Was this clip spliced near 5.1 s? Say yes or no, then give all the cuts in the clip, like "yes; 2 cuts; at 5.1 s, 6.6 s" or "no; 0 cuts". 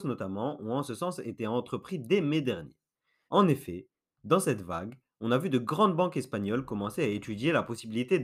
no; 1 cut; at 3.3 s